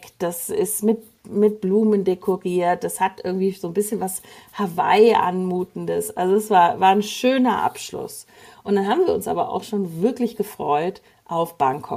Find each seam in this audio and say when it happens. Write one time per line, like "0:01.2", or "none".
none

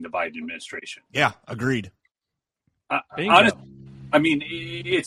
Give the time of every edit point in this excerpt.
0:01.1

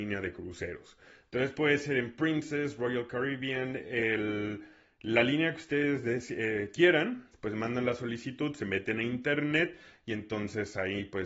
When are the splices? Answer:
none

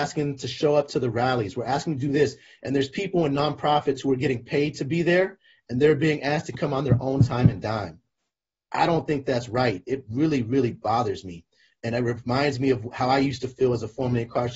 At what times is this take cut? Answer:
none

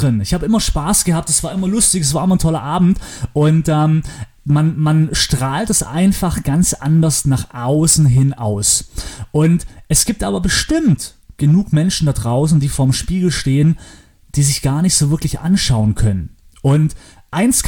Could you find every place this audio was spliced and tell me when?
none

